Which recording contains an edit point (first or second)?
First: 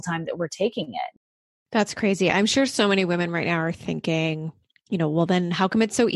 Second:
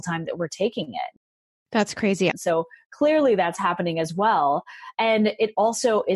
second